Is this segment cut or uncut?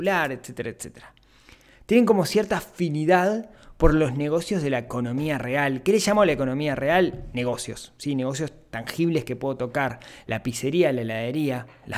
uncut